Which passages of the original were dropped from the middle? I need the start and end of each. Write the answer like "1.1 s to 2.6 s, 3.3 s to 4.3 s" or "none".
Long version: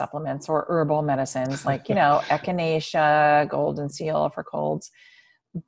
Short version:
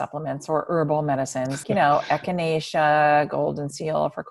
1.6 s to 1.8 s